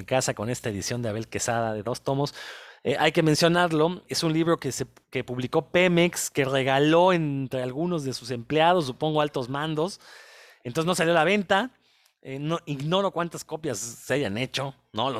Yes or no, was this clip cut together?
yes